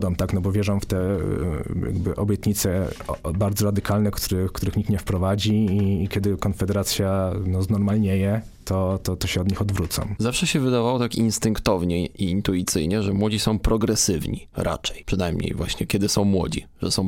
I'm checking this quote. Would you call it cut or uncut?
uncut